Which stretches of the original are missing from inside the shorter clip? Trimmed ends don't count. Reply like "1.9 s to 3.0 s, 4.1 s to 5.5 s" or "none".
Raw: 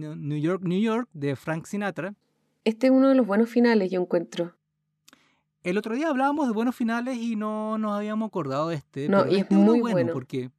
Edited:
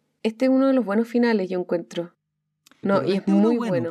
5.2 s to 9.1 s